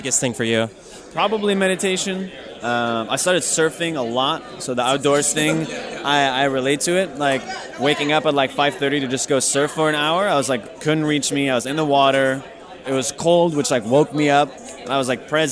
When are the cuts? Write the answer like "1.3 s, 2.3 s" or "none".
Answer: 10.7 s, 12.8 s